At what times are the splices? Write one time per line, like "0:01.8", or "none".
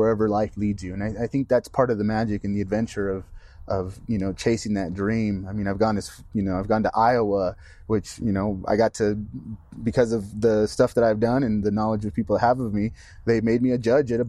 none